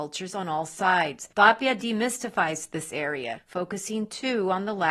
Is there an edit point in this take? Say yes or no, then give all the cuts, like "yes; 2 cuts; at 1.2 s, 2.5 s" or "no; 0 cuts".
yes; 2 cuts; at 1.3 s, 3.4 s